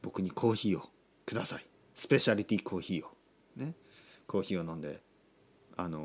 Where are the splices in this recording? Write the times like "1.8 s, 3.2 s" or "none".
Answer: none